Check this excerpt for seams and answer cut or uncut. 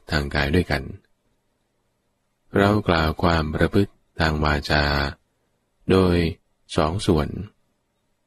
uncut